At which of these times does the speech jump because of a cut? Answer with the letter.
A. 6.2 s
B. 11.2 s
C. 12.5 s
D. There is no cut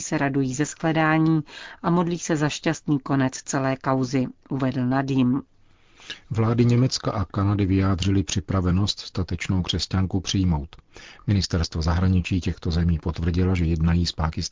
D